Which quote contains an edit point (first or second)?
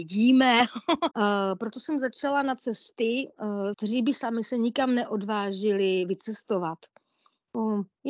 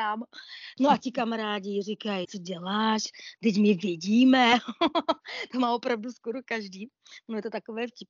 first